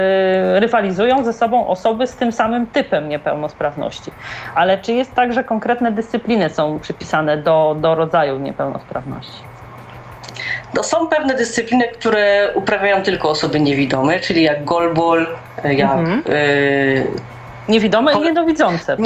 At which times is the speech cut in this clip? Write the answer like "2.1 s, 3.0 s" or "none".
none